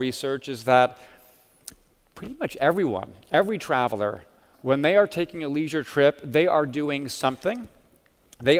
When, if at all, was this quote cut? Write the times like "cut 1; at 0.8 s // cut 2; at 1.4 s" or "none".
none